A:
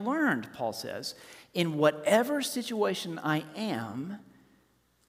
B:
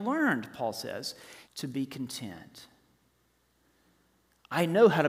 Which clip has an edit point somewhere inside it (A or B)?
B